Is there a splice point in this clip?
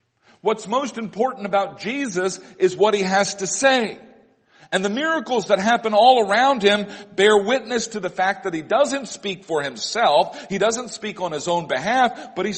no; 0 cuts

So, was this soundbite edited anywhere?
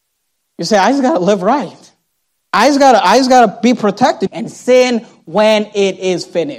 yes; 2 cuts; at 2.4 s, 4.3 s

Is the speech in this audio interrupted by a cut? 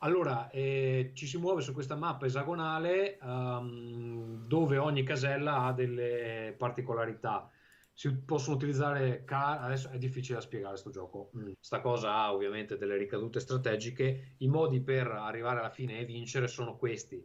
yes; 1 cut; at 11.5 s

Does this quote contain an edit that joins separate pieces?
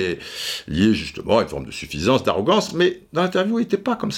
no; 0 cuts

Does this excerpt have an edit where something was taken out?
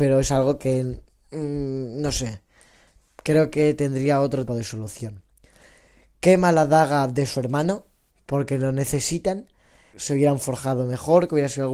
yes; 2 cuts; at 4.5 s, 9.9 s

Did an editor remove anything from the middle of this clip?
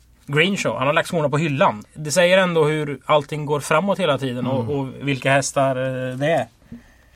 yes; 1 cut; at 1.9 s

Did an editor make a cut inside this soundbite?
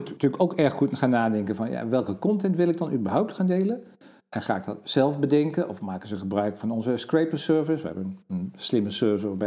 no; 0 cuts

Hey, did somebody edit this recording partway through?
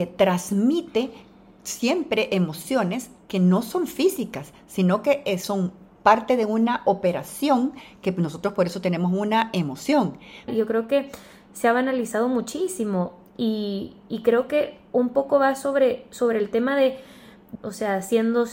yes; 2 cuts; at 10.5 s, 17.5 s

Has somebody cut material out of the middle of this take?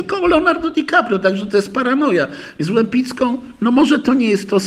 no; 0 cuts

